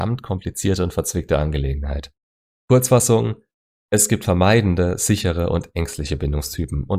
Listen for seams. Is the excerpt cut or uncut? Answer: uncut